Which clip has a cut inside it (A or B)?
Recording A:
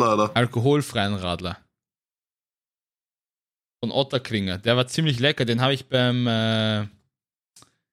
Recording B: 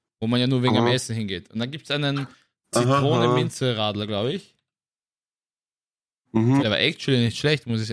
B